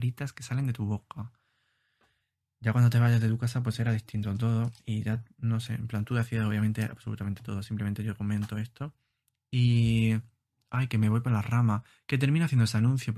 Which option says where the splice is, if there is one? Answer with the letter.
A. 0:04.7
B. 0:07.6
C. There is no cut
C